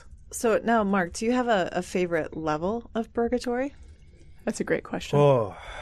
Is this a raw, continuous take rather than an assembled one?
yes; 0 cuts

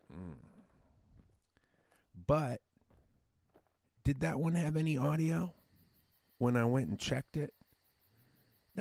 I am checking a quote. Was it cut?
no; 0 cuts

